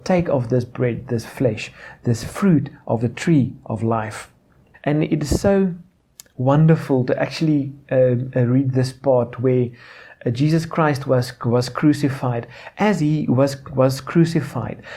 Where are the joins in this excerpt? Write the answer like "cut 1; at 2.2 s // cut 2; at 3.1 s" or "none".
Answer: cut 1; at 4.7 s